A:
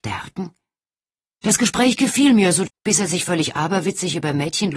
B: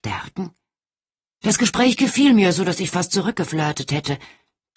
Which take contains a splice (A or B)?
A